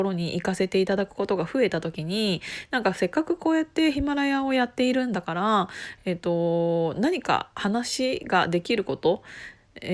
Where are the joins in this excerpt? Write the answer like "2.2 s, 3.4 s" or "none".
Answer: none